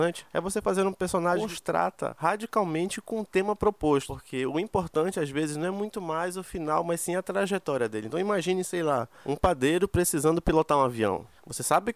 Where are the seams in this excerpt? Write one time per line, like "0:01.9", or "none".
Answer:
none